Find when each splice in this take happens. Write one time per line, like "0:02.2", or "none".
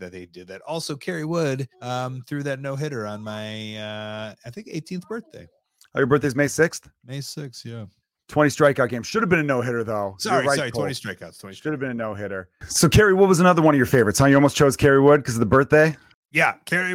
0:01.7